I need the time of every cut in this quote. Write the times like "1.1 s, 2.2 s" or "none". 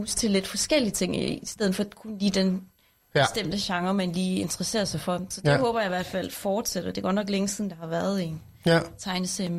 none